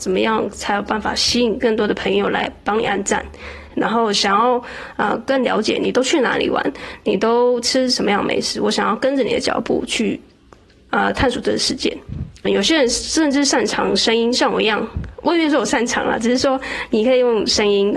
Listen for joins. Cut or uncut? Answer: cut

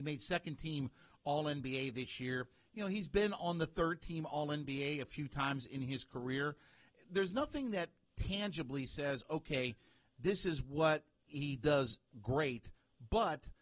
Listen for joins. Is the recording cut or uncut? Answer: uncut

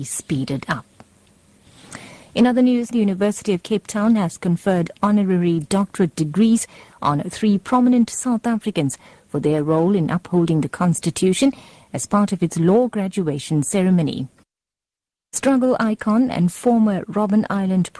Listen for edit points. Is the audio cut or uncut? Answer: cut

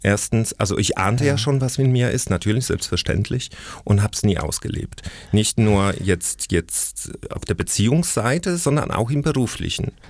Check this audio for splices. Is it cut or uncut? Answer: uncut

